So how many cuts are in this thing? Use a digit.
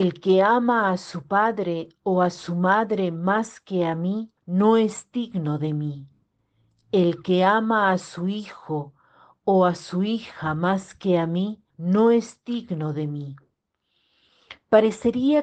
2